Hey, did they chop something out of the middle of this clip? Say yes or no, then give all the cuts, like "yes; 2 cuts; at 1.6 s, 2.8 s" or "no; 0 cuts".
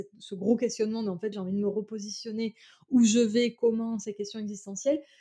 yes; 1 cut; at 1.3 s